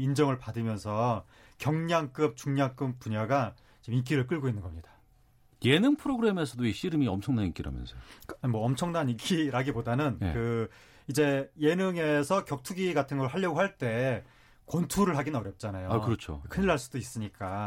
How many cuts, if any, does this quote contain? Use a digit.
0